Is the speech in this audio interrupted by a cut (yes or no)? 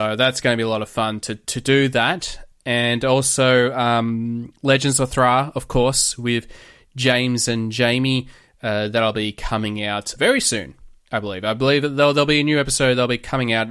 no